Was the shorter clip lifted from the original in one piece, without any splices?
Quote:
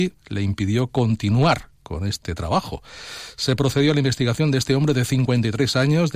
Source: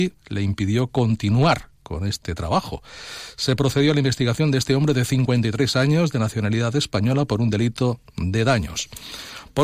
yes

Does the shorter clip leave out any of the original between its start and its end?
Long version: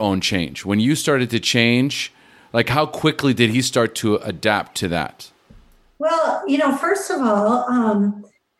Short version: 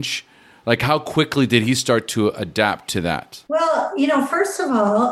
yes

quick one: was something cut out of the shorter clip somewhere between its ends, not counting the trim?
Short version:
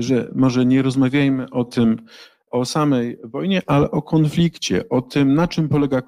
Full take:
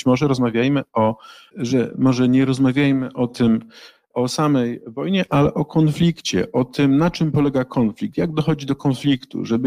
no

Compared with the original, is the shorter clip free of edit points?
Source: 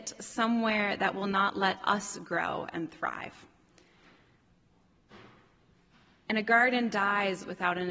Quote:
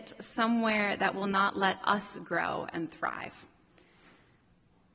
yes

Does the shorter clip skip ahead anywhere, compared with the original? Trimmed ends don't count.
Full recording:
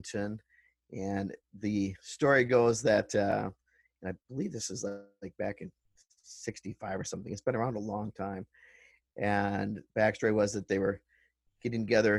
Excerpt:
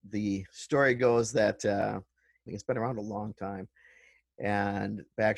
yes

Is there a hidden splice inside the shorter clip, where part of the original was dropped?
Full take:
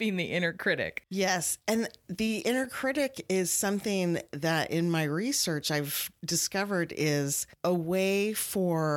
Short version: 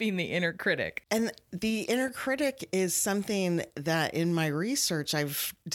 yes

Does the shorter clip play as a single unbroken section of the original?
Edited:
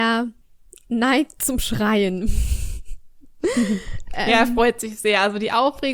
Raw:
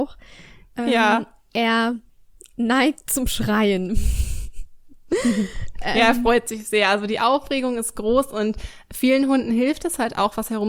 yes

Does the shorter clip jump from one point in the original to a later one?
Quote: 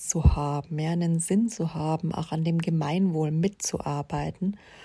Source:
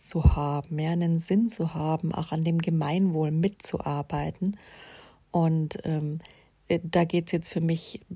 no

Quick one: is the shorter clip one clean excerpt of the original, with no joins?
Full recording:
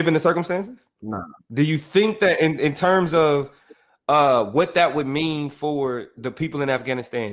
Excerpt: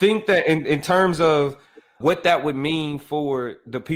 no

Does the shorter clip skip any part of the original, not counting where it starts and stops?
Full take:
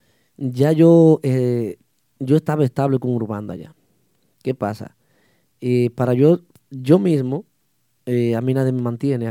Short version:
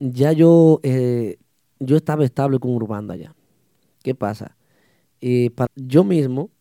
yes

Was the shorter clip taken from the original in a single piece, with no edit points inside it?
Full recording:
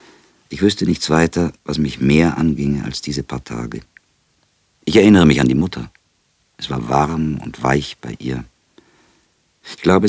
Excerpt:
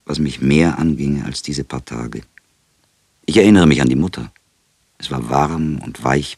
yes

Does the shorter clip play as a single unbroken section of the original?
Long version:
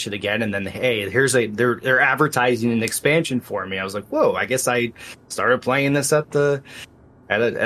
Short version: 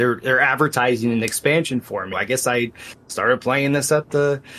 no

